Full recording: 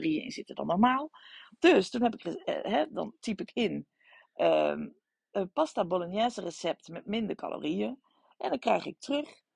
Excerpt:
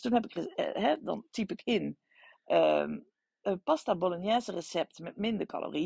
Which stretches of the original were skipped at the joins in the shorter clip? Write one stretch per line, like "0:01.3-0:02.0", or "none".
none